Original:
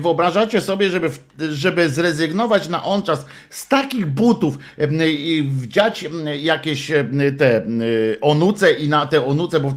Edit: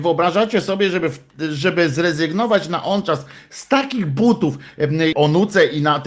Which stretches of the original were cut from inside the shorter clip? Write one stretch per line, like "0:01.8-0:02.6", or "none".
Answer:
0:05.1-0:08.2